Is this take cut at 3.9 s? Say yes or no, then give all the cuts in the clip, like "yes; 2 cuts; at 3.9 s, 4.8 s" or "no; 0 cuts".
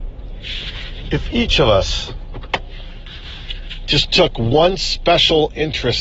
no; 0 cuts